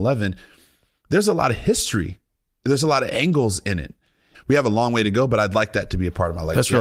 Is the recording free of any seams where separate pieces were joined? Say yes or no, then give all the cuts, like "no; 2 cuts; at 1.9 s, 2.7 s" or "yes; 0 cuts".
no; 1 cut; at 4.3 s